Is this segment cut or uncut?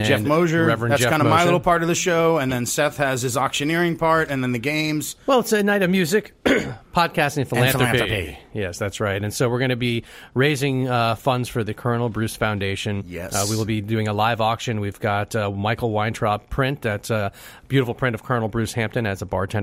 uncut